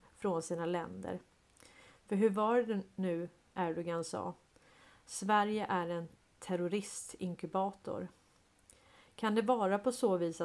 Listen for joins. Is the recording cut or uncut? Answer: uncut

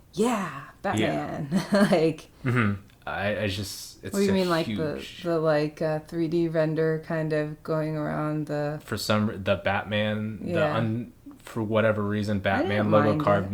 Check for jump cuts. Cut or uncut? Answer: cut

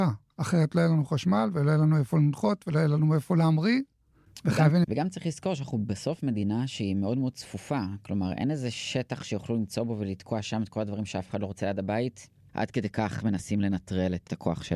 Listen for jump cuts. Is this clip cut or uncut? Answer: cut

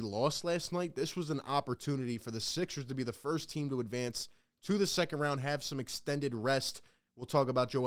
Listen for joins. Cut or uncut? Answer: uncut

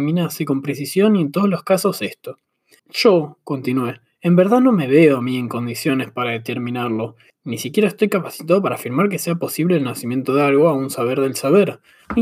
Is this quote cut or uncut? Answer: cut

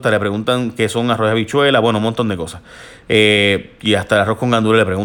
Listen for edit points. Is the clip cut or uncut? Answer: uncut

